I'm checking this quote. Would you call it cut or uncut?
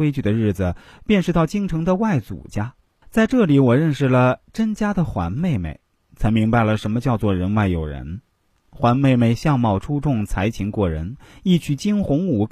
uncut